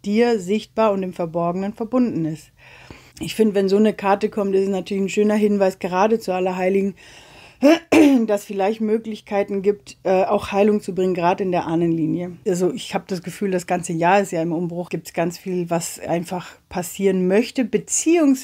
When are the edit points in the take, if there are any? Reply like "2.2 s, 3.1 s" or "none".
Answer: 3.1 s, 12.4 s, 14.9 s